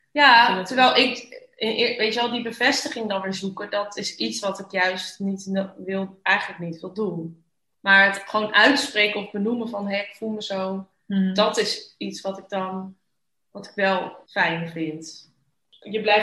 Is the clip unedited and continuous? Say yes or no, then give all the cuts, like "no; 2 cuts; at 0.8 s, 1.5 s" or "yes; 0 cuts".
yes; 0 cuts